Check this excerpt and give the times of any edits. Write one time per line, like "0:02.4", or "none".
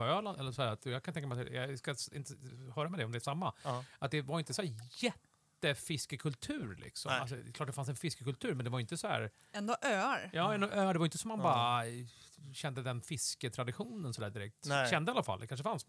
none